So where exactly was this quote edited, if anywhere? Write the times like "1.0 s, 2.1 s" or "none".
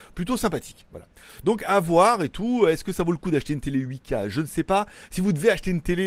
none